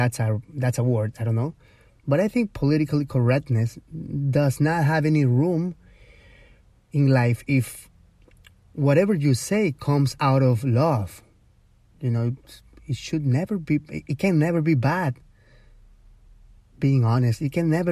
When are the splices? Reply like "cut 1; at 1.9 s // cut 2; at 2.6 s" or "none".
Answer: none